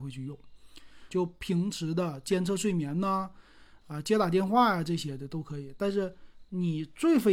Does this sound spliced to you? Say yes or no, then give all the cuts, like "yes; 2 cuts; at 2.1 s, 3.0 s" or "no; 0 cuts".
yes; 1 cut; at 1.1 s